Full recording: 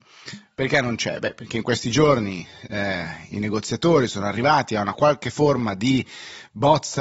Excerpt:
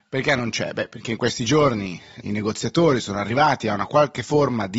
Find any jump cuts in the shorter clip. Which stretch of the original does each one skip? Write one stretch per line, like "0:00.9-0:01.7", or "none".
0:02.7-0:03.3